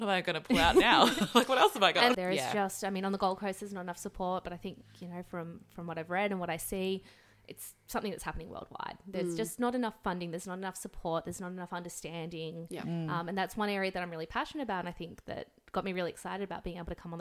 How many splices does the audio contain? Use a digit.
1